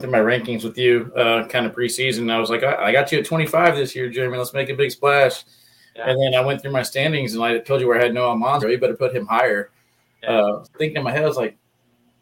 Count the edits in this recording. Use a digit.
2